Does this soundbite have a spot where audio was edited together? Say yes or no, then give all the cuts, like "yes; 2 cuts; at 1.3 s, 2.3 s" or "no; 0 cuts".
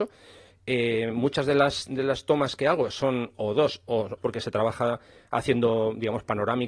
yes; 1 cut; at 4.2 s